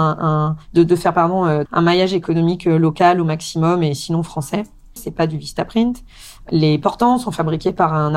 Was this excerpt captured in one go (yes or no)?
no